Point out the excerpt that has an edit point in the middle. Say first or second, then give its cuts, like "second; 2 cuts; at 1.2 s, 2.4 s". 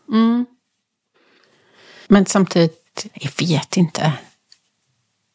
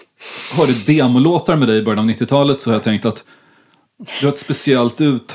first; 2 cuts; at 2.0 s, 3.1 s